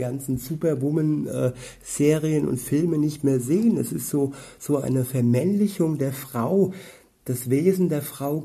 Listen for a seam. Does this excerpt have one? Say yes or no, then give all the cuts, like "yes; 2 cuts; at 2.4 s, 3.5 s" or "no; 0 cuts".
no; 0 cuts